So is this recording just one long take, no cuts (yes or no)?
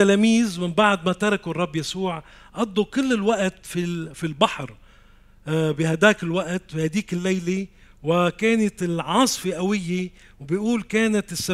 yes